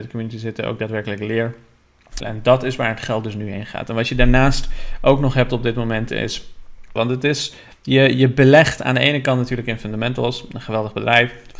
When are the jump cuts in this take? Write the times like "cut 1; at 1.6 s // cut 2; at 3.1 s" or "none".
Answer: cut 1; at 2.2 s // cut 2; at 7.0 s